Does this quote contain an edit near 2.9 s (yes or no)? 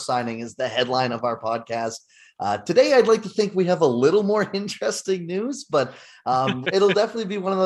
no